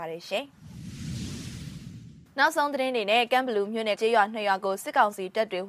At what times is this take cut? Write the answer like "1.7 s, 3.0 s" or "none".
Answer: 4.0 s